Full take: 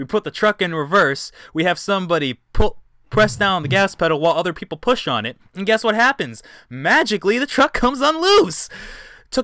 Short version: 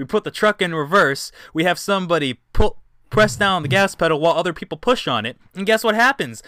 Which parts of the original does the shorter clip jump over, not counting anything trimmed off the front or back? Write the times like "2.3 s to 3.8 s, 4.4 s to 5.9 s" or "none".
none